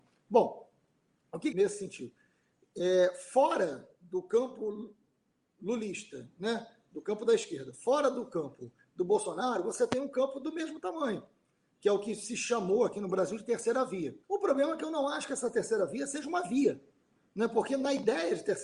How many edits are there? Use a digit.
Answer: 2